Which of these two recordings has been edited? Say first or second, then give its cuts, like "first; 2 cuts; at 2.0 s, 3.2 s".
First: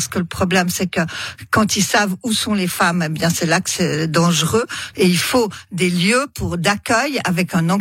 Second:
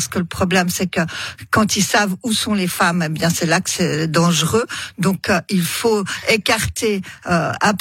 first; 1 cut; at 4.9 s